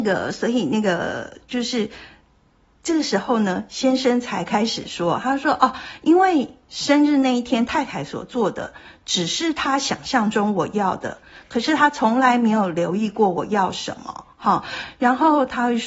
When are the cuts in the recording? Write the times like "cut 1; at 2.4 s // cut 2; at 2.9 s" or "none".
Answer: none

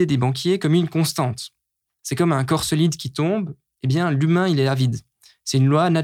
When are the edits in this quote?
none

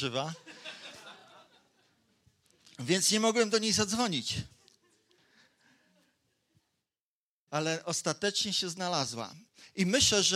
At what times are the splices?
none

